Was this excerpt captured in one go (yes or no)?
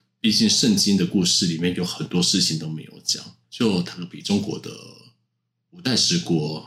no